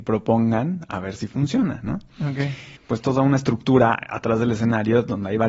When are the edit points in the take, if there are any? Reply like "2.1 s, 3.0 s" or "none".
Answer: 2.8 s